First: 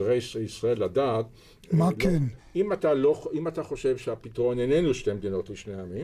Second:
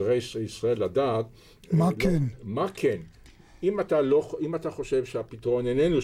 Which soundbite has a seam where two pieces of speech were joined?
first; 1 cut; at 2.4 s

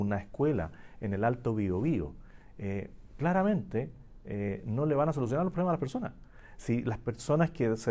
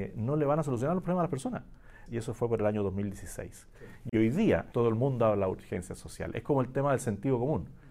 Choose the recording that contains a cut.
second; 2 cuts; at 2.1 s, 4.7 s

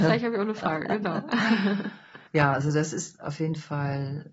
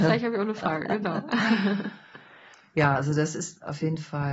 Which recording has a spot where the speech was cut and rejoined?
first; 1 cut; at 2.3 s

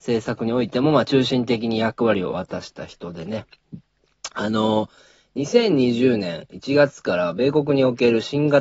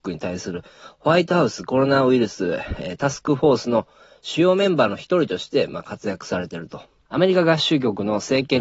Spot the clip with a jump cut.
second; 1 cut; at 7.1 s

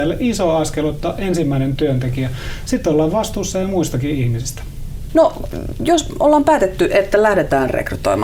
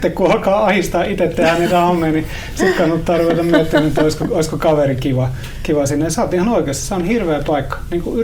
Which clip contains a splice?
first; 1 cut; at 5.1 s

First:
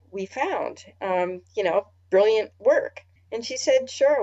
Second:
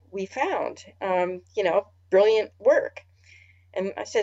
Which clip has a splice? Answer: first; 1 cut; at 3.2 s

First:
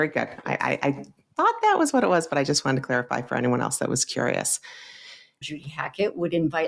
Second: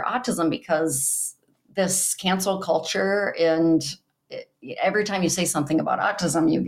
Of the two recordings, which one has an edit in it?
first; 1 cut; at 5.4 s

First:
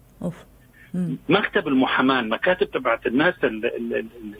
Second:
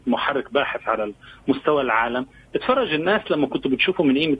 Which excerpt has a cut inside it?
first; 1 cut; at 1.2 s

